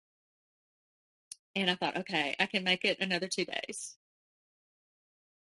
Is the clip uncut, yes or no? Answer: no